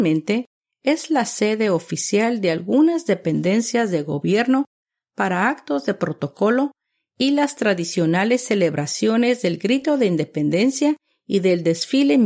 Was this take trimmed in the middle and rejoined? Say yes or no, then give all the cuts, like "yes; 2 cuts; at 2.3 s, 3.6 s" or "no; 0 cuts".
no; 0 cuts